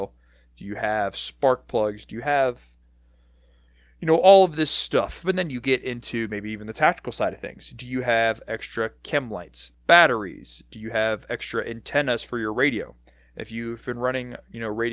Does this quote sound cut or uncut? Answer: cut